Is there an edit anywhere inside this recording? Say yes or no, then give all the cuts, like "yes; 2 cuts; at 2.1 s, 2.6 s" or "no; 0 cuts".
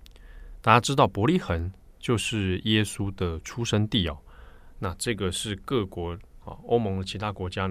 yes; 1 cut; at 4.7 s